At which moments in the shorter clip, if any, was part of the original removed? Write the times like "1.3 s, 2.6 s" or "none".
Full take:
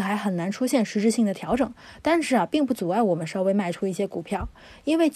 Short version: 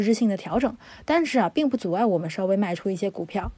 none